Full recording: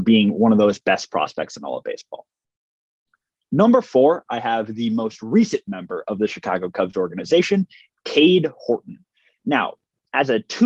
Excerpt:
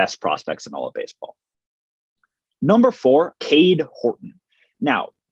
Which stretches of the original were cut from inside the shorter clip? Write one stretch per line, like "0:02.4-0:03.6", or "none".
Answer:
0:04.2-0:08.0